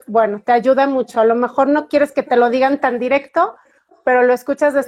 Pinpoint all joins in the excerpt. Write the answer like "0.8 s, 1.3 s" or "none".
none